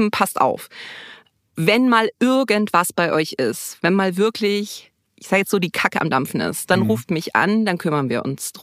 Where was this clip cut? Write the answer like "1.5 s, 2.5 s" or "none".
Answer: none

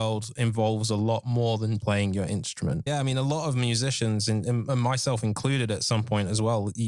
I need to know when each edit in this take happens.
1.8 s, 2.9 s

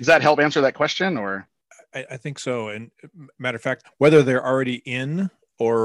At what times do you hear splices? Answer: 3.8 s

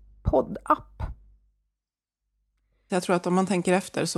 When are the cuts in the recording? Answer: 2.9 s

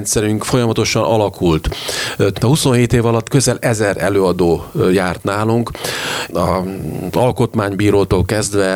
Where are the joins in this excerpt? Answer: 2.3 s, 6.3 s

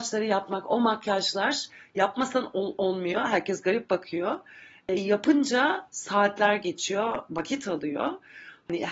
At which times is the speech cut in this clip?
none

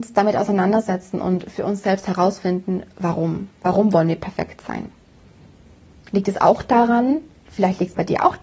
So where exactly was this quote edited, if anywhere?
none

